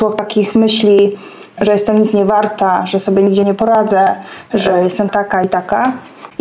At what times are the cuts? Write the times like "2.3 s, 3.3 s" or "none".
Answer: 5.1 s